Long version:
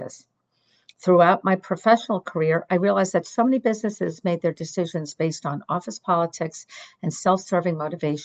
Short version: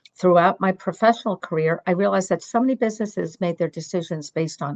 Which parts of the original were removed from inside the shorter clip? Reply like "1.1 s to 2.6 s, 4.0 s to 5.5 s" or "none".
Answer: none